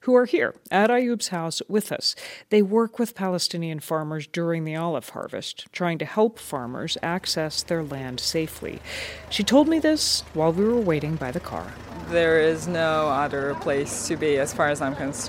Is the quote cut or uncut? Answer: uncut